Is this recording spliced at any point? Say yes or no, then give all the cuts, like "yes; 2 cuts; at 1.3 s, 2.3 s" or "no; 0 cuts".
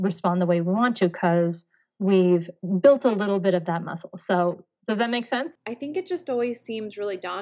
no; 0 cuts